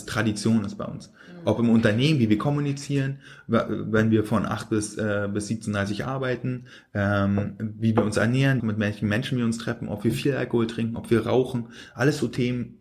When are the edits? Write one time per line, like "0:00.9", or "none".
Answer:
0:08.6